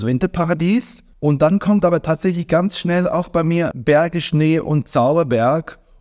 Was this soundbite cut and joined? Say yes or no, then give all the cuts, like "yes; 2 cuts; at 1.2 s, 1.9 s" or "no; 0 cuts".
no; 0 cuts